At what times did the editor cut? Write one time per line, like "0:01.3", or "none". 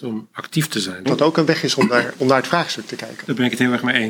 0:01.1
0:02.2

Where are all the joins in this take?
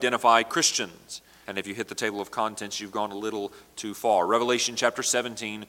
0:01.4

